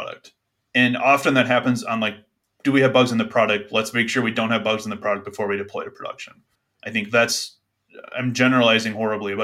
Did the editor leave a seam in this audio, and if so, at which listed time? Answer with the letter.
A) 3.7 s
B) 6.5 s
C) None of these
C